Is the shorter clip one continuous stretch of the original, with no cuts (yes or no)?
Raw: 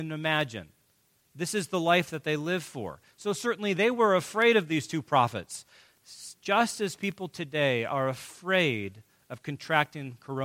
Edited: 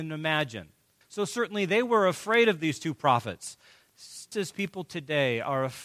no